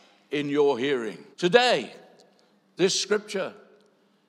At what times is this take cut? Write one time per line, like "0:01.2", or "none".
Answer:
0:01.3